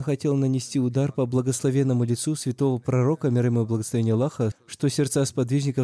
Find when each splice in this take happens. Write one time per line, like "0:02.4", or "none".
0:04.5